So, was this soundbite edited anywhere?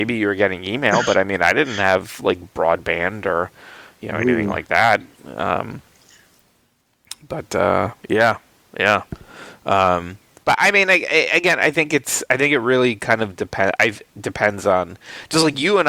no; 0 cuts

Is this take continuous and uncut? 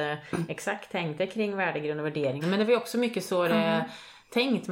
no; 1 cut; at 2.4 s

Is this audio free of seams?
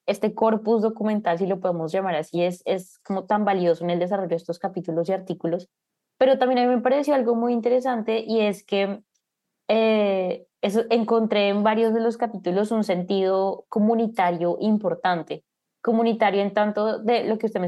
yes; 0 cuts

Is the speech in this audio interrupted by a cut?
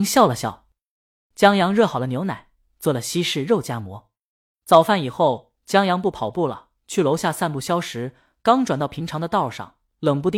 no; 0 cuts

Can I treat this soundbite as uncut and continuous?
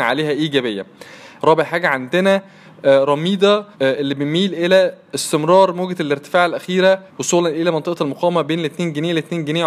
no; 3 cuts; at 1.4 s, 3.7 s, 7.1 s

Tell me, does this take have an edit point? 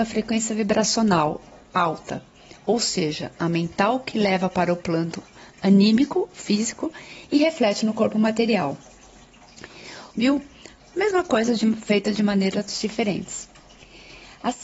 yes; 2 cuts; at 10.1 s, 12.1 s

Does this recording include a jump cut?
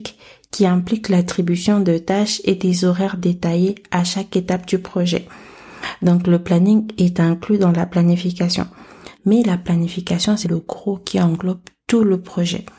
yes; 2 cuts; at 9.1 s, 10.4 s

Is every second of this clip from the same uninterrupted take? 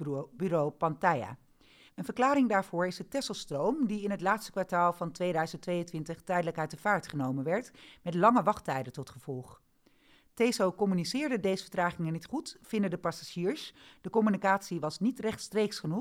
no; 1 cut; at 1.9 s

